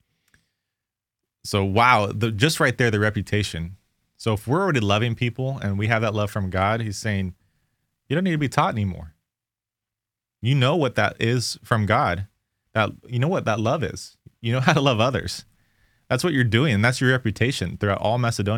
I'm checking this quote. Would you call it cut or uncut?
uncut